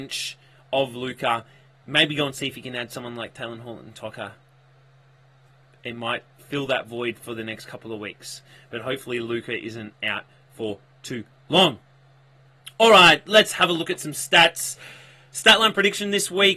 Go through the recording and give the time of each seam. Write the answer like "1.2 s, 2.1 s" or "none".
none

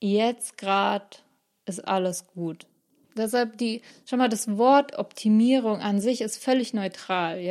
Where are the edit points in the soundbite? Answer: 3.1 s

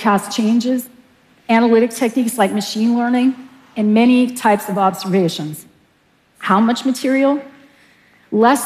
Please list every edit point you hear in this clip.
6.2 s

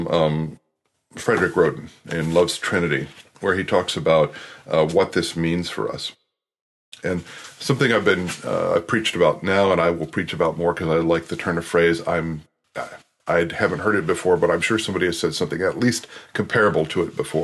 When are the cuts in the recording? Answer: none

